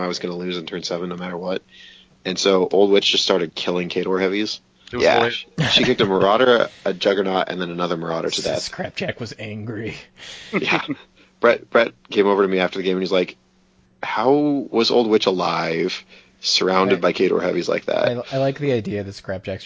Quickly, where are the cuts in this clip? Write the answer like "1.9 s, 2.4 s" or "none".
4.9 s